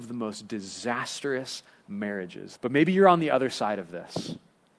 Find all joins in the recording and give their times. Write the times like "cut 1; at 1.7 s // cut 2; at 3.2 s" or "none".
cut 1; at 2.6 s